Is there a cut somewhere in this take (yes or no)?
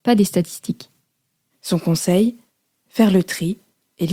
no